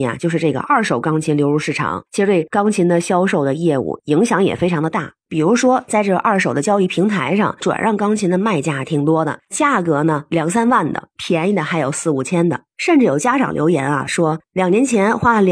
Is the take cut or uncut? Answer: uncut